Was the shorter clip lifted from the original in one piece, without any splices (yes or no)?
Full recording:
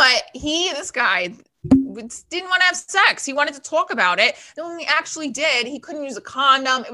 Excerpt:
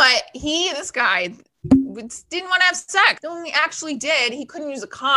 no